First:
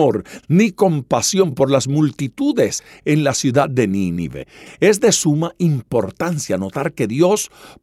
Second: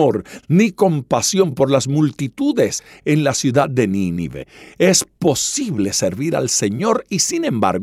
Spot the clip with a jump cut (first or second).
first